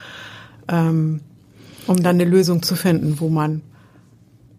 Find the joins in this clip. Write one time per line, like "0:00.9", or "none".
none